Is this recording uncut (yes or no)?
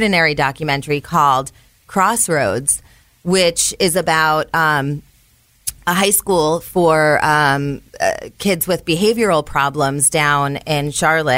yes